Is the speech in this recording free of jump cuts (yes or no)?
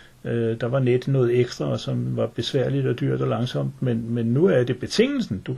yes